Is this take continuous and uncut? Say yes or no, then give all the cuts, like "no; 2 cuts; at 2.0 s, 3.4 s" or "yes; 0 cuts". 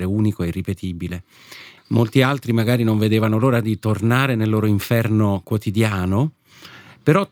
no; 1 cut; at 1.8 s